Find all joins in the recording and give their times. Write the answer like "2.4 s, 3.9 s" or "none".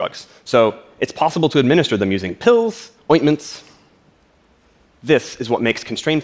3.0 s

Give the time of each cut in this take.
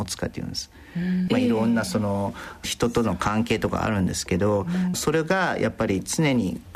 1.3 s, 4.9 s

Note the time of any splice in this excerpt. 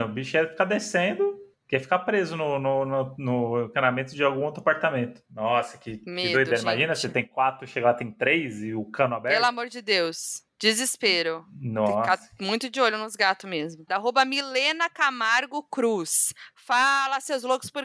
13.9 s

